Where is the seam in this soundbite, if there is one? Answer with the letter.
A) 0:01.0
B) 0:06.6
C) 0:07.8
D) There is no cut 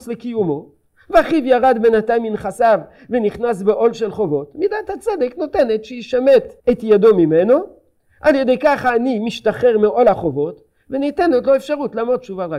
B